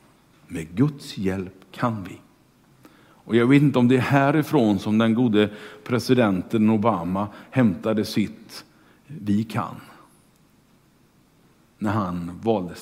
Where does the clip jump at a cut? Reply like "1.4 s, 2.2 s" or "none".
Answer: none